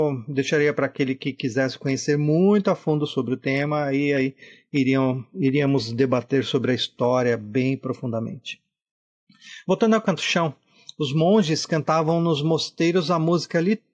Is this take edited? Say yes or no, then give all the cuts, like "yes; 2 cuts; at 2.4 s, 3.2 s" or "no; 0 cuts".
no; 0 cuts